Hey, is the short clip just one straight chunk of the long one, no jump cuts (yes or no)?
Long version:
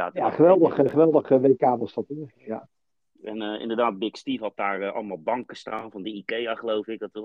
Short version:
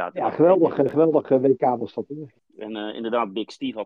no